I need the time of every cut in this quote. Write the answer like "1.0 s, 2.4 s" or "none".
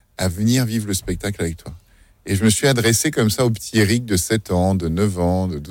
none